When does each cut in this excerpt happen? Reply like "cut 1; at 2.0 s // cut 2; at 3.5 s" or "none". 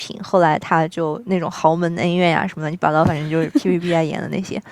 none